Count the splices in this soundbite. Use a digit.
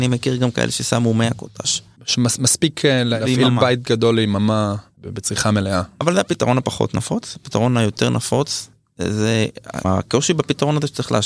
0